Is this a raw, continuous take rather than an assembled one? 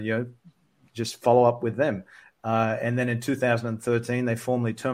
yes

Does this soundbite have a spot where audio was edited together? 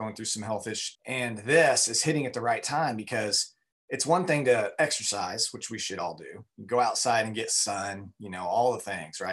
yes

